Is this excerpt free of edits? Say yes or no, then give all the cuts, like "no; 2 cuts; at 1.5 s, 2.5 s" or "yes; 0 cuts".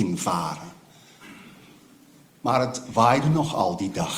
yes; 0 cuts